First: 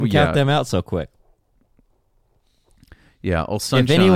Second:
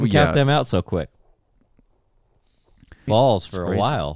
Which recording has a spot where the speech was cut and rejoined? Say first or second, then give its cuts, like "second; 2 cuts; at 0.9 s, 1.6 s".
second; 1 cut; at 3.1 s